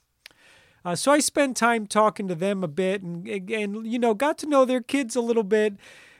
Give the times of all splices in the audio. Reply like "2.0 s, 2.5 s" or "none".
none

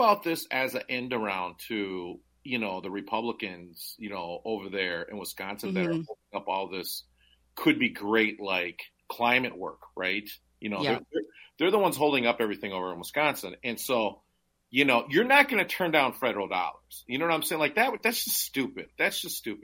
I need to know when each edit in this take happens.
7.4 s

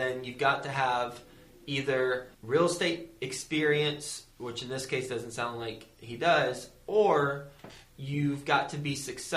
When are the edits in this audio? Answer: 2.3 s, 4.3 s

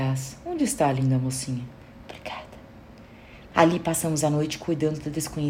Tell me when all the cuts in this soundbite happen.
2.0 s, 3.5 s

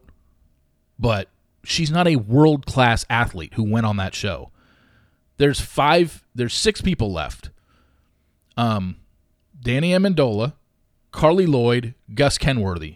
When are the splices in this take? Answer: 11.1 s

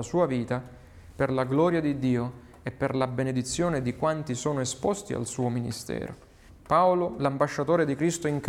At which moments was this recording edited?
6.5 s

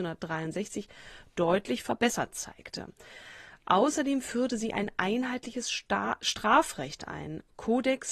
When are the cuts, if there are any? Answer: none

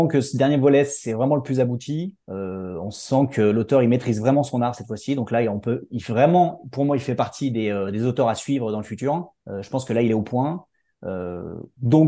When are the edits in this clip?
2.2 s, 9.4 s

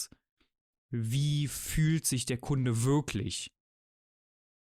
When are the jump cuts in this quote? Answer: none

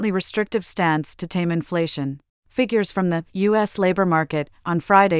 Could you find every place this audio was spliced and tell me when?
2.4 s

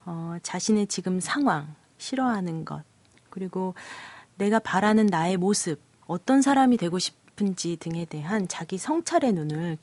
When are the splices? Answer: 1.9 s, 6.0 s

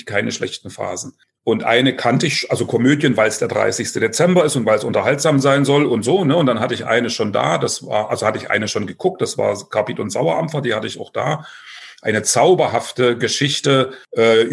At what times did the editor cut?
1.4 s

